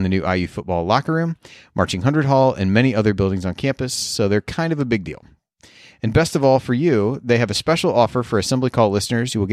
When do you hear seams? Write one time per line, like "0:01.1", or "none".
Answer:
none

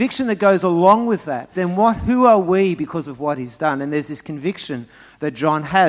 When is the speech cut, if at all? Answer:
0:01.5

